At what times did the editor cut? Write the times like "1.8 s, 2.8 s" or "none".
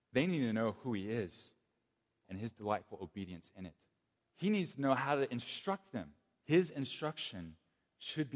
2.2 s, 4.2 s, 6.4 s